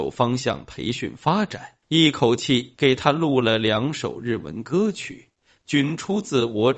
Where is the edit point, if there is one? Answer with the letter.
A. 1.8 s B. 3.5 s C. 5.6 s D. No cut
A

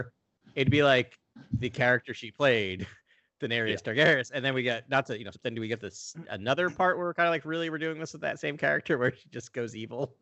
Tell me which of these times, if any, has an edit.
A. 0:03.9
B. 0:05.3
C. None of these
B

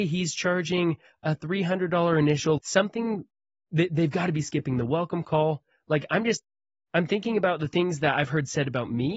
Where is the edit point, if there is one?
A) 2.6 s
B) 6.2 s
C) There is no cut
A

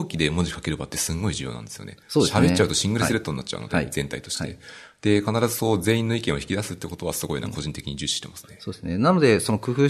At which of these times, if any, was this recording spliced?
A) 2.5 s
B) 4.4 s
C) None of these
C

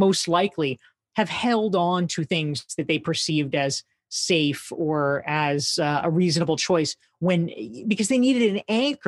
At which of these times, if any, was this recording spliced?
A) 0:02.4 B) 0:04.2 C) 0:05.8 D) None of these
D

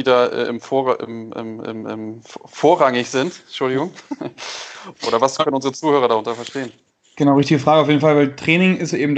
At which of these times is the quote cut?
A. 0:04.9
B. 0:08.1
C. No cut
A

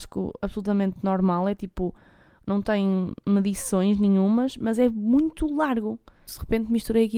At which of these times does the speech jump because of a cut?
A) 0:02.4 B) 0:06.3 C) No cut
B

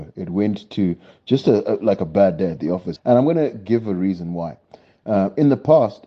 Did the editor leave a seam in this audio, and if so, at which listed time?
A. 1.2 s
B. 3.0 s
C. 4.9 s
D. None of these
B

